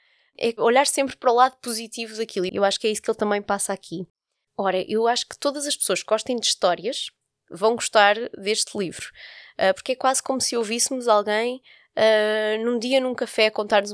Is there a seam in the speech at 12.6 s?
no; 2 cuts; at 2.5 s, 4.5 s

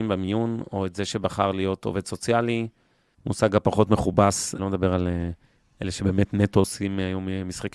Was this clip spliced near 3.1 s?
yes; 2 cuts; at 3.1 s, 4.6 s

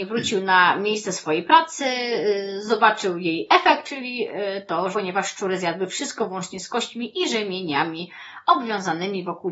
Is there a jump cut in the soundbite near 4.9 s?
yes; 2 cuts; at 3.8 s, 4.9 s

